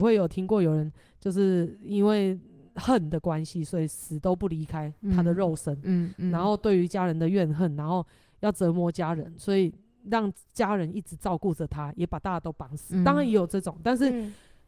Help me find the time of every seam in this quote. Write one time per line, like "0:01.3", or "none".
none